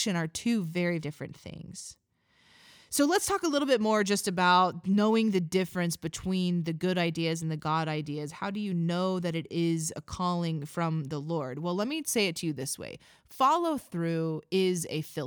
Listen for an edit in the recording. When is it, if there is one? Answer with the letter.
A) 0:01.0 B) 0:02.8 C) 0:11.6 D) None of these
A